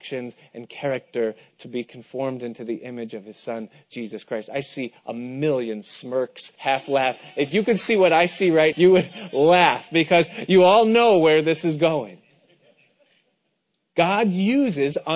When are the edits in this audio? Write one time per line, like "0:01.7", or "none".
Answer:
0:06.6
0:08.7